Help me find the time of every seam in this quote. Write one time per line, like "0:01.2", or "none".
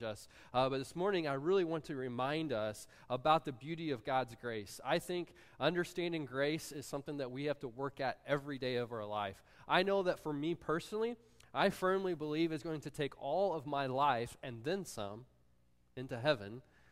none